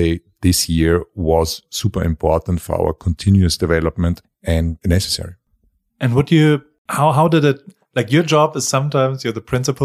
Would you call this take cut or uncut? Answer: uncut